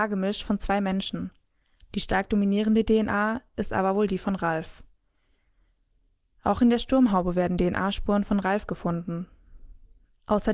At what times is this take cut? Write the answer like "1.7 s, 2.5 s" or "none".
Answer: none